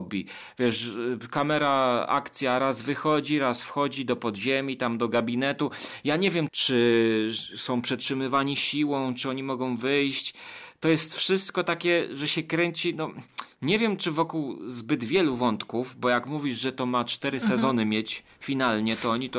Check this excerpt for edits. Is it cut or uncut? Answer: cut